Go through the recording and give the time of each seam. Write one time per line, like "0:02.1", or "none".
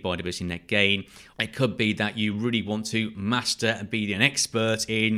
0:01.3